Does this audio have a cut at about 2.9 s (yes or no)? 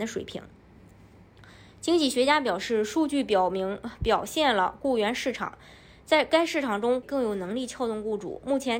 no